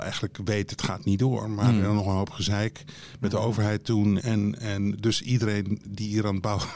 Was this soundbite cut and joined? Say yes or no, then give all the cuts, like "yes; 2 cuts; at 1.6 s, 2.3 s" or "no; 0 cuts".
yes; 1 cut; at 4.2 s